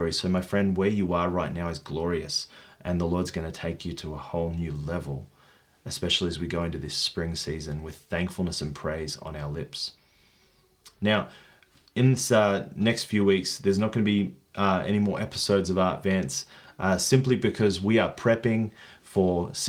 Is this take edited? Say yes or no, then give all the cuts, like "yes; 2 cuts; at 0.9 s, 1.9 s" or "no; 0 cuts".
no; 0 cuts